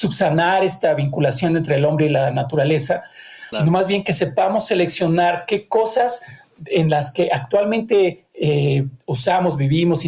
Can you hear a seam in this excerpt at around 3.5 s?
yes; 1 cut; at 3.5 s

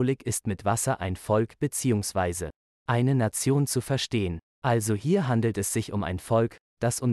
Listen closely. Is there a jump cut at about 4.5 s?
no; 0 cuts

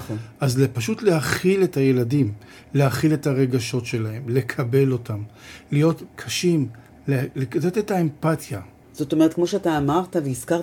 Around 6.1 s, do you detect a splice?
yes; 2 cuts; at 6.1 s, 8.8 s

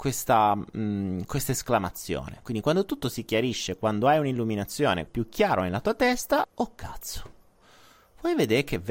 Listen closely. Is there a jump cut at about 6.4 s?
yes; 2 cuts; at 5.1 s, 6.4 s

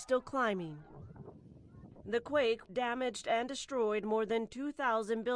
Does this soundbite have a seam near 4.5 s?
no; 1 cut; at 2.6 s

